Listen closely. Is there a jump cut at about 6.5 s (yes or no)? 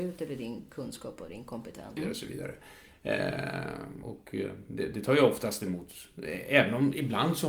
no